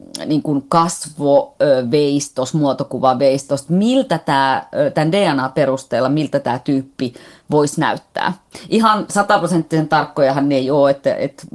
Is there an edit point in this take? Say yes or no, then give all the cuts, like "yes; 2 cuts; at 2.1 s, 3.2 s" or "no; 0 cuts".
no; 0 cuts